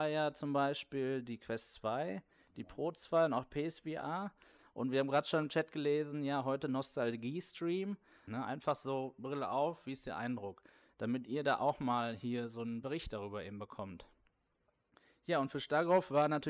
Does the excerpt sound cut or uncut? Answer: cut